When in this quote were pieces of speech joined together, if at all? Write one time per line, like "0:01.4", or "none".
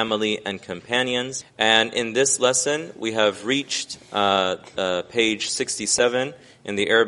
0:01.4

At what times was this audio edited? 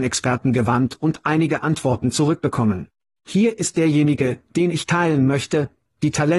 none

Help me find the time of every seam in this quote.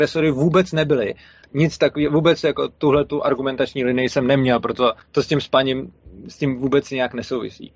0:01.4
0:05.0

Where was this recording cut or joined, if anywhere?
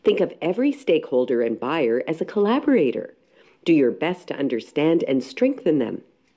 none

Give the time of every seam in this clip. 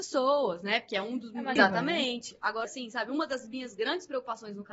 0:01.6
0:02.6

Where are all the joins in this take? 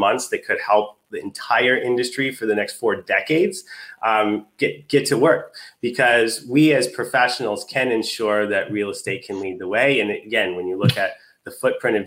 none

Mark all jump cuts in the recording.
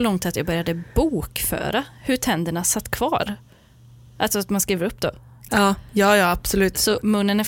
0:05.5

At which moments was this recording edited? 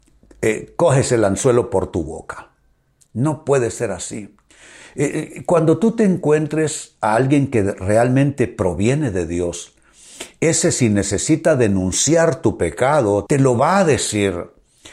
0:03.1
0:13.3

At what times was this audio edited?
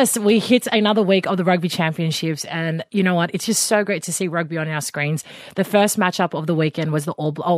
none

